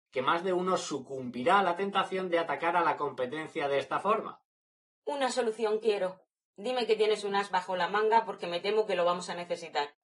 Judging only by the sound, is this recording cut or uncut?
uncut